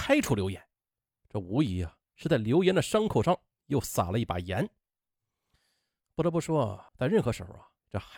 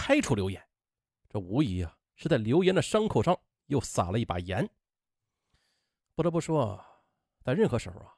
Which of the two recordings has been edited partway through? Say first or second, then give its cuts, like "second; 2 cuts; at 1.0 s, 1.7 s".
first; 1 cut; at 6.9 s